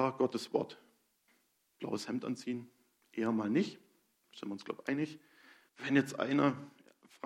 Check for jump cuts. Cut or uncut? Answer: cut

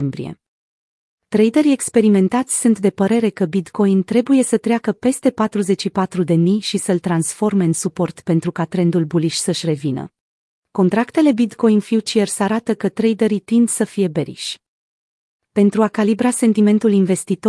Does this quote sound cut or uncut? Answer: cut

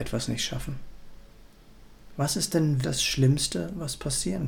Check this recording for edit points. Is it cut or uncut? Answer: cut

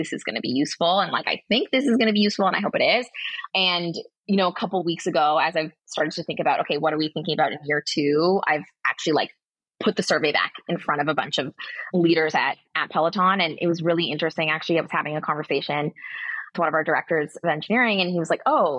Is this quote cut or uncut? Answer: uncut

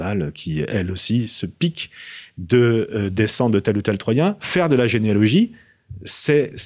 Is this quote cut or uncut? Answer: uncut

